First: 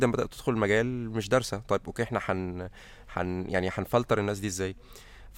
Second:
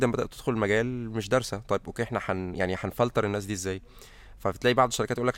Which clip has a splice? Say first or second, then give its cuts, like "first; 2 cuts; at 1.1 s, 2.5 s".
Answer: second; 1 cut; at 2.5 s